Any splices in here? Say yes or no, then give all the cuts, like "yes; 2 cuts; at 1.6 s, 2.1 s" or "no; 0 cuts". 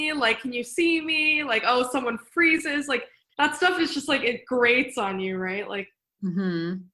no; 0 cuts